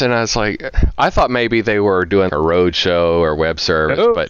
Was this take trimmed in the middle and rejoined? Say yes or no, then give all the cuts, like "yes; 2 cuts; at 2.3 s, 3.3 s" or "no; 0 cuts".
yes; 1 cut; at 2.3 s